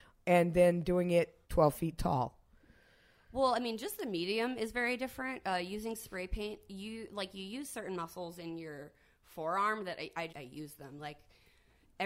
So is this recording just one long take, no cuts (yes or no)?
no